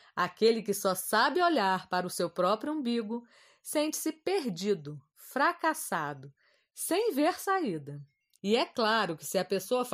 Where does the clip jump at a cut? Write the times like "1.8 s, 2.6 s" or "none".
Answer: 8.4 s